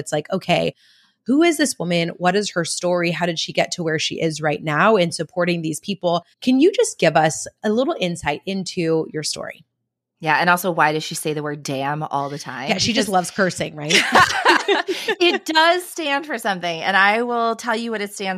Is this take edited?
yes; 1 cut; at 6.3 s

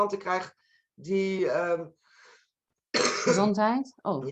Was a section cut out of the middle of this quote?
no; 0 cuts

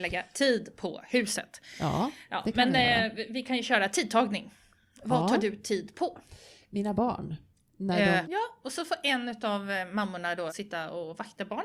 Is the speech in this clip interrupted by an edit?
yes; 2 cuts; at 8.2 s, 10.5 s

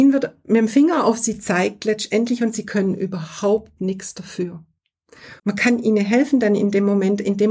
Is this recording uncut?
no; 1 cut; at 5.4 s

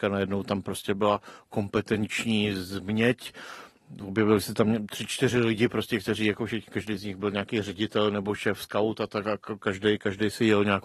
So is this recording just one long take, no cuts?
yes; 0 cuts

